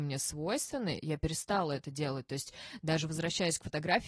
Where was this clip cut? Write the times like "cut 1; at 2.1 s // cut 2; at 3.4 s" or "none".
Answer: none